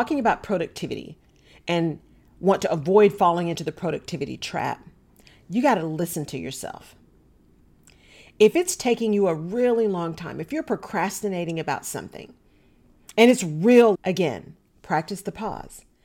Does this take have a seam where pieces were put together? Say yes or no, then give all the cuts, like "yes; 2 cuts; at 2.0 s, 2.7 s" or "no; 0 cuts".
yes; 1 cut; at 13.9 s